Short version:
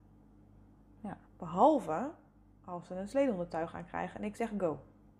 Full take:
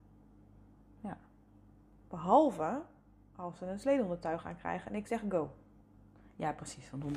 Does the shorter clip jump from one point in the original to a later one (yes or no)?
yes